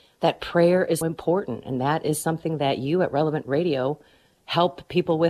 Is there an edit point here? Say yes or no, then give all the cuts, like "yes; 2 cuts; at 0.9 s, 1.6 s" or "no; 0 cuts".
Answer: yes; 1 cut; at 1.0 s